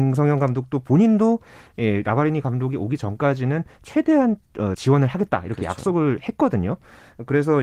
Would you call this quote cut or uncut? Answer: cut